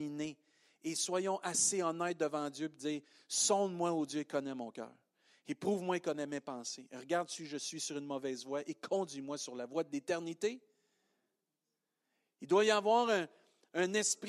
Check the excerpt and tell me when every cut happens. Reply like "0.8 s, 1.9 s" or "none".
none